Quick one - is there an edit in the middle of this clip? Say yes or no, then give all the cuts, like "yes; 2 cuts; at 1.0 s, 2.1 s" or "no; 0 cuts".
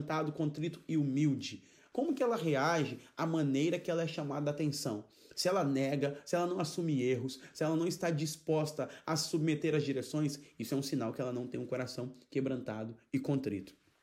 yes; 1 cut; at 1.9 s